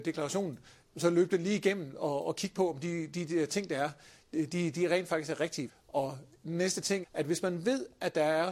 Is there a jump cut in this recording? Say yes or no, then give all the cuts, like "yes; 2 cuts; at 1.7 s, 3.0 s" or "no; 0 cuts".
yes; 2 cuts; at 5.7 s, 7.0 s